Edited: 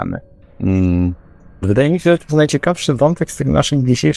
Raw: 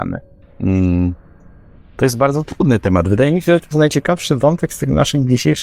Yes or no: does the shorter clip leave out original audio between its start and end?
yes